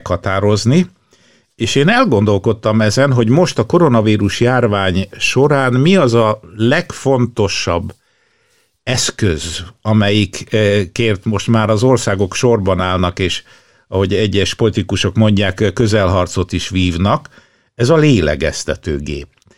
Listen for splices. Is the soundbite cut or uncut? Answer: uncut